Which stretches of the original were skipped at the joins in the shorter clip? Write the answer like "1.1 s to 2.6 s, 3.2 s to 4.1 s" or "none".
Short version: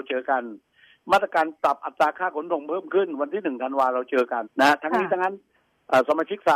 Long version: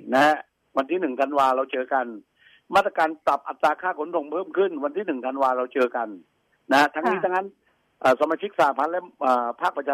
6.1 s to 6.6 s